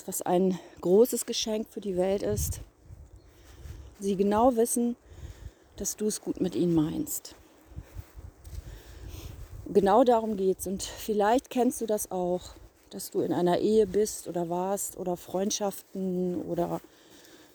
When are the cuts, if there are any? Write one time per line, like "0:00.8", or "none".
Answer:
0:03.9